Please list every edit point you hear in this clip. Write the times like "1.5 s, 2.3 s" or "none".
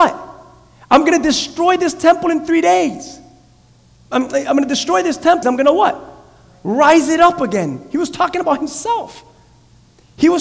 5.4 s